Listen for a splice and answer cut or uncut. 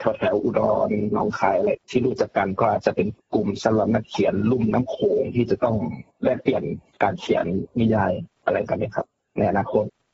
uncut